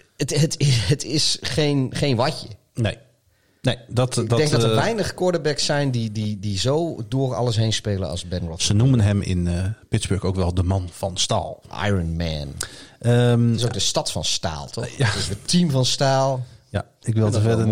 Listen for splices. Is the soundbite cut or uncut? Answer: uncut